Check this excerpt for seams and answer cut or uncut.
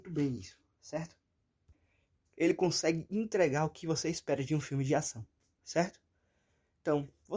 uncut